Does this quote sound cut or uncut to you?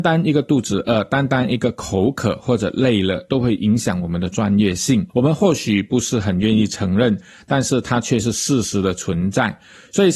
cut